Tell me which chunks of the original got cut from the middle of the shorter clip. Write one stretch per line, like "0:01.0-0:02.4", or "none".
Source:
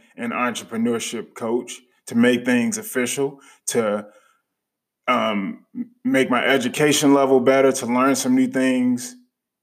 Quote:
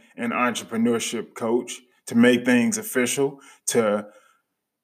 none